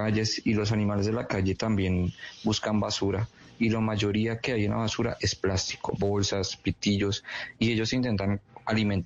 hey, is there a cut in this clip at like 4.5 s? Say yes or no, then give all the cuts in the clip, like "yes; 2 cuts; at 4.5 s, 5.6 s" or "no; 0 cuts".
no; 1 cut; at 6.0 s